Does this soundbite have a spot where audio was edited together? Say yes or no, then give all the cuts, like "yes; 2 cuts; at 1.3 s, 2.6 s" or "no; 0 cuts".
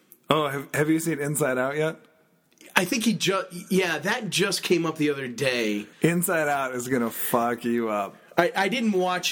yes; 1 cut; at 5.9 s